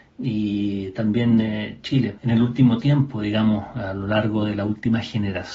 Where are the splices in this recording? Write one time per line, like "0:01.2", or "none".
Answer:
0:02.2